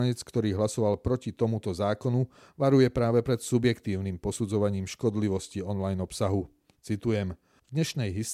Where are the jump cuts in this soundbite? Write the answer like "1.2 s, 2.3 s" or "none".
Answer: none